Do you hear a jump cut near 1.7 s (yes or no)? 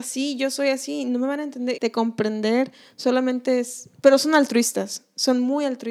yes